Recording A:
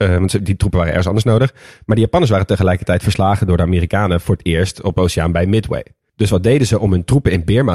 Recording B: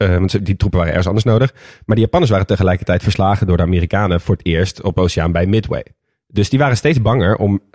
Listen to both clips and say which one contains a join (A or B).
A